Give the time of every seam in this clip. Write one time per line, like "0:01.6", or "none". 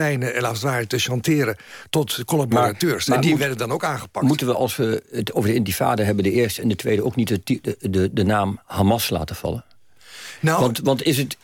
none